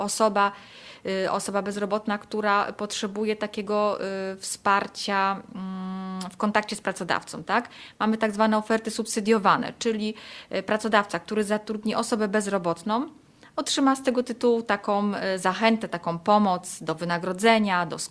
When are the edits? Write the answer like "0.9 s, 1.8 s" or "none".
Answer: none